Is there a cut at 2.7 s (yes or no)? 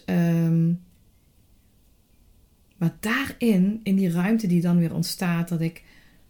no